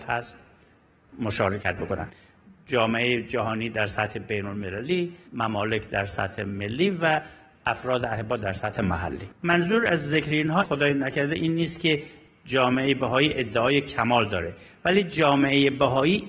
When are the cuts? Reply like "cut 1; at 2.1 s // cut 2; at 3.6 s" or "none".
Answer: cut 1; at 5.3 s // cut 2; at 9.3 s